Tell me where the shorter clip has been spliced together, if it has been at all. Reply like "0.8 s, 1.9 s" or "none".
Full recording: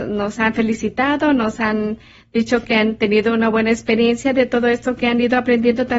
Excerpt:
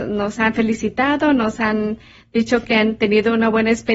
none